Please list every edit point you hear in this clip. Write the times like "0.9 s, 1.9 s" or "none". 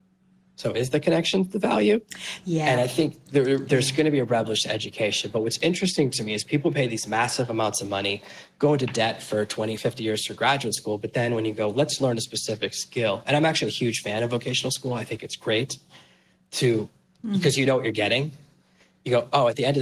9.8 s